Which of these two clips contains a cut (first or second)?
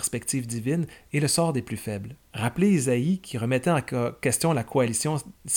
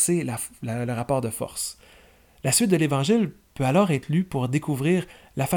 first